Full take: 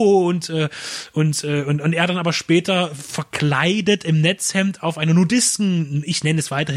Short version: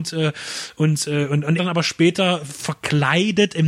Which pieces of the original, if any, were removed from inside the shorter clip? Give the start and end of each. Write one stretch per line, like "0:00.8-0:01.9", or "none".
0:01.9-0:02.1

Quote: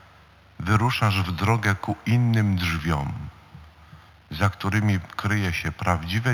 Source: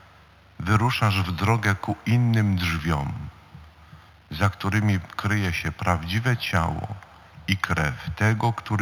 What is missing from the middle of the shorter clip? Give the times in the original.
none

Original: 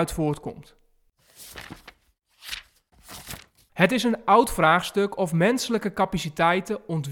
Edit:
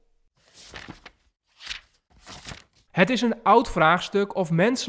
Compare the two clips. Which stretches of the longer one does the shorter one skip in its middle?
none

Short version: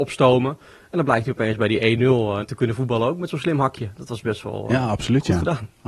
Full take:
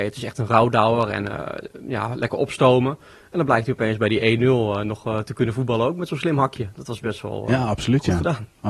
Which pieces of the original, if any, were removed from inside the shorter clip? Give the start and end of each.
0:04.8-0:05.2

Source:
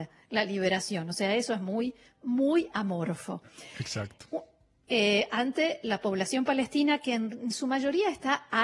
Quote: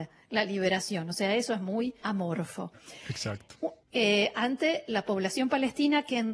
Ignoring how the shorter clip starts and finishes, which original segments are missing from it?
0:02.0-0:02.7
0:04.5-0:04.8

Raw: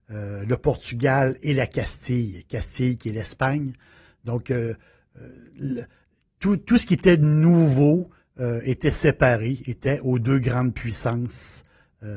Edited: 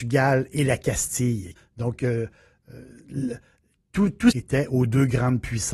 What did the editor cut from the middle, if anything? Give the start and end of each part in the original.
0:02.5-0:04.0
0:06.8-0:09.6

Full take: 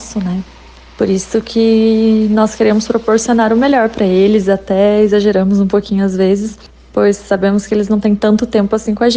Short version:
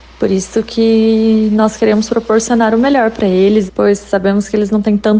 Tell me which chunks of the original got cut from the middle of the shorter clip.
0:04.4-0:06.8

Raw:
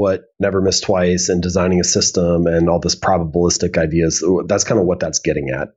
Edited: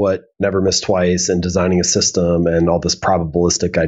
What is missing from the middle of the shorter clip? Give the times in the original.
none

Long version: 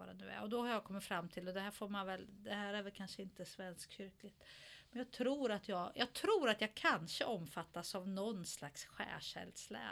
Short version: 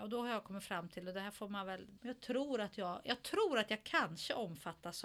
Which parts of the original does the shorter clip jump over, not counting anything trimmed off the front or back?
0:02.4-0:04.9

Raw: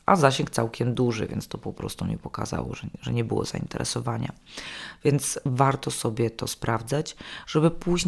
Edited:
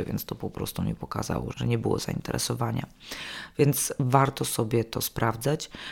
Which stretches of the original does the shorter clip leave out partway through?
0:02.8-0:03.0

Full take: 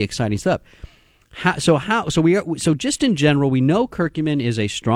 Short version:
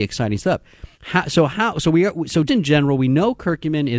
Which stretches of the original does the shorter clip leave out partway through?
0:00.9-0:01.2
0:02.8-0:03.0

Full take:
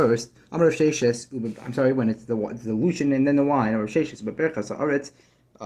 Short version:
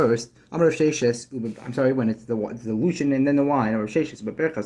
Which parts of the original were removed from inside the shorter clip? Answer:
none

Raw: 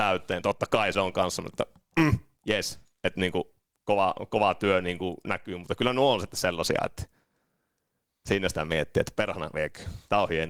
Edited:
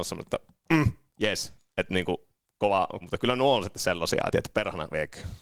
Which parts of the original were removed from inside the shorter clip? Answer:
0:04.3-0:05.6
0:06.9-0:08.9

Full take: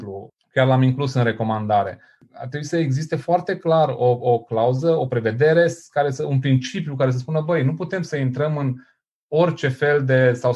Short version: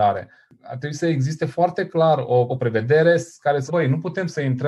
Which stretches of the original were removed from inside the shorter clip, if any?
0:04.2-0:05.0
0:06.2-0:07.4

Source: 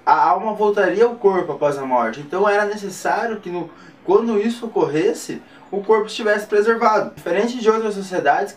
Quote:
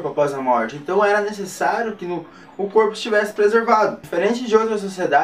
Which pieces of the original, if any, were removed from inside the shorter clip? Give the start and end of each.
0:03.9-0:05.6

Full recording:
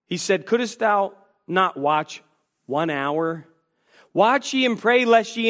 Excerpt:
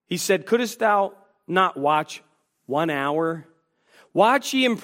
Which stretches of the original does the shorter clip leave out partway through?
none

